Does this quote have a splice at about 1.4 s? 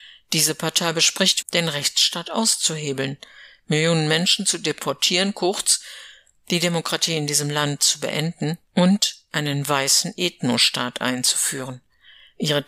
yes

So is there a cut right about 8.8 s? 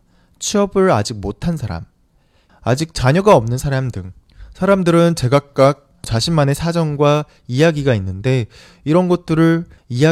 no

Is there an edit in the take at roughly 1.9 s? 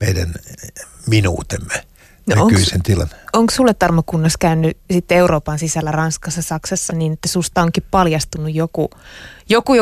no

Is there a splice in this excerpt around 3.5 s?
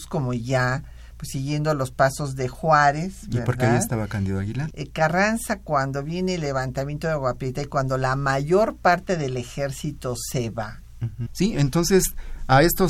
no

